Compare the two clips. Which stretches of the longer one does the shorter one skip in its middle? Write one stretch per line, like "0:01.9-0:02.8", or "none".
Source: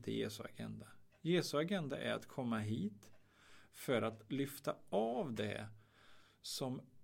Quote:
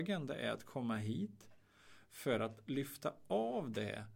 none